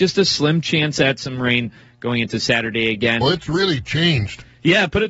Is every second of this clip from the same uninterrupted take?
no; 1 cut; at 3.2 s

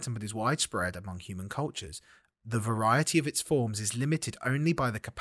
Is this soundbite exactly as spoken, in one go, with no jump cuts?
yes; 0 cuts

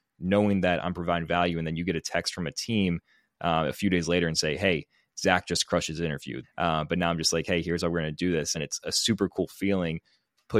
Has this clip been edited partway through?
yes; 2 cuts; at 6.4 s, 8.5 s

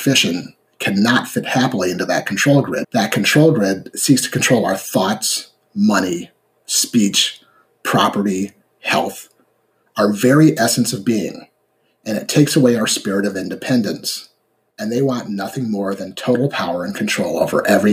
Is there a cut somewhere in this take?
yes; 2 cuts; at 2.8 s, 14.7 s

